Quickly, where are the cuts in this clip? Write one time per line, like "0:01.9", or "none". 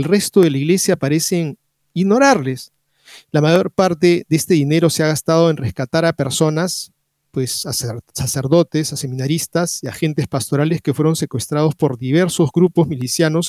none

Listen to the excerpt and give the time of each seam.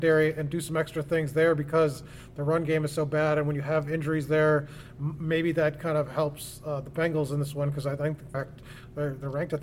0:08.3

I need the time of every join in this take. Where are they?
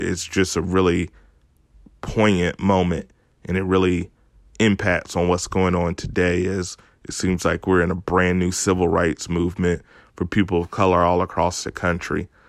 none

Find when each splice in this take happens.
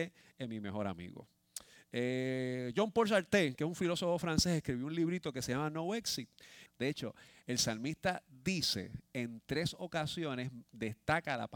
0:06.7

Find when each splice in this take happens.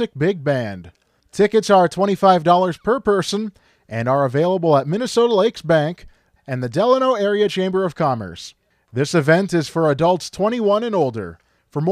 0:06.4

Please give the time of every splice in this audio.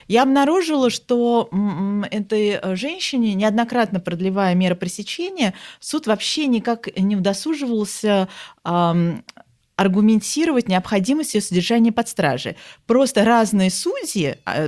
none

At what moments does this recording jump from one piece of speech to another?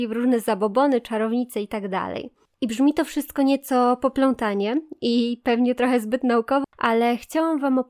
0:02.5
0:06.6

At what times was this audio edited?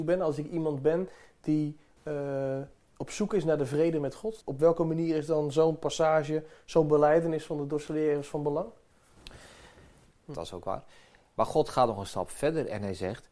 0:02.0
0:04.4
0:10.2

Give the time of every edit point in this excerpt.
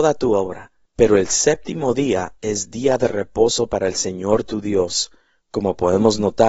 0:05.4

